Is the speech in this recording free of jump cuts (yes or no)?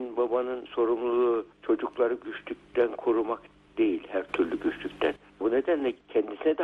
no